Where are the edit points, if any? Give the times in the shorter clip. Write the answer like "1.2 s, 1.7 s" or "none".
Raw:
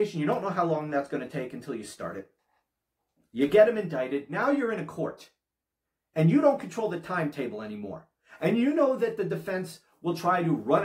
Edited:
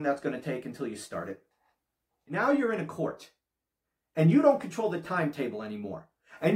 2.3 s